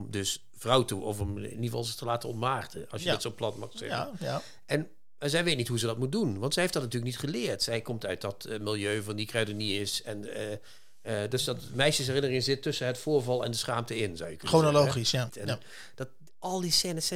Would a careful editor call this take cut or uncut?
cut